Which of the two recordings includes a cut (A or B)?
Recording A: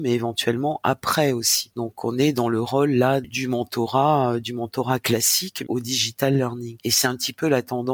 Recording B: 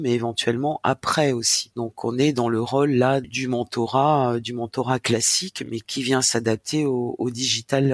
A